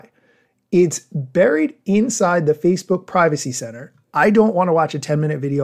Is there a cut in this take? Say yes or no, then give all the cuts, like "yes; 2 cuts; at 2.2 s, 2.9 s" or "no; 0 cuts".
yes; 1 cut; at 4.0 s